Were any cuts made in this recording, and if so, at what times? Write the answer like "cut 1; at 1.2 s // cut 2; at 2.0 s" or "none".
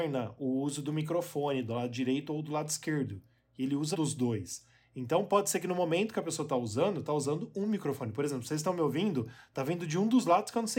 cut 1; at 3.9 s